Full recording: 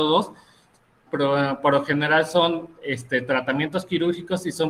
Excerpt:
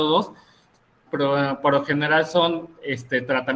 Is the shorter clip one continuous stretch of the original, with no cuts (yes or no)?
yes